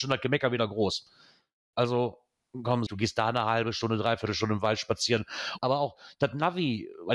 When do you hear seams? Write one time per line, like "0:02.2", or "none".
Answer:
0:02.9
0:05.6